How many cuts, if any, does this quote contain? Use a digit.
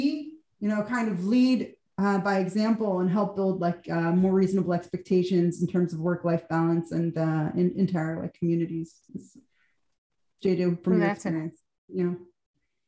0